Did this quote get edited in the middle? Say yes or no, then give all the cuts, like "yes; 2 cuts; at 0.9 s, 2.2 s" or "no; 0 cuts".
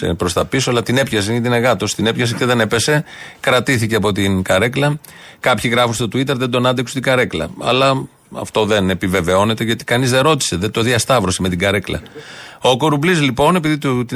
no; 0 cuts